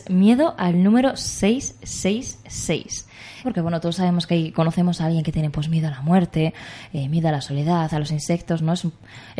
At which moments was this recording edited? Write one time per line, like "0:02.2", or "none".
0:03.4
0:07.9